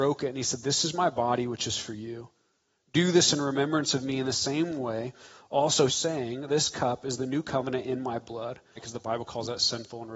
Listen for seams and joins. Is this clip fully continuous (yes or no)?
no